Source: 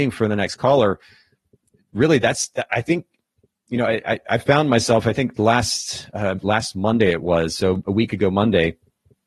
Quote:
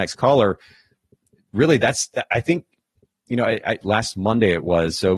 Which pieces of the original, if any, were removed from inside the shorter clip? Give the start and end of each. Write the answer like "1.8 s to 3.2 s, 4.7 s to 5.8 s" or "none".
4.2 s to 6.4 s